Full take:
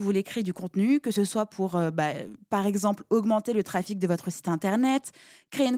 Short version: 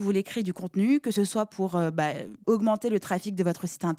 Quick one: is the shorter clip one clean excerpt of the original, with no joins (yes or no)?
no